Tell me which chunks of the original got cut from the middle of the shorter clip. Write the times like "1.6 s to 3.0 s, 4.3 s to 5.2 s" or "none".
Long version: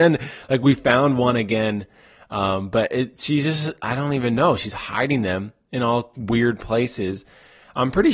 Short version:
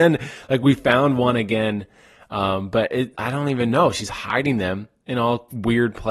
3.1 s to 3.8 s